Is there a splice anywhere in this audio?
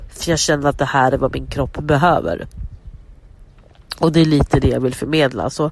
no; 0 cuts

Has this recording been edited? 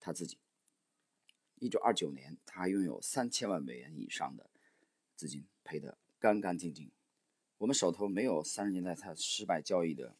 yes; 2 cuts; at 1.5 s, 5.6 s

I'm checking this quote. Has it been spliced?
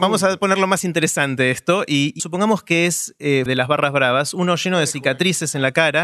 yes; 2 cuts; at 2.2 s, 3.5 s

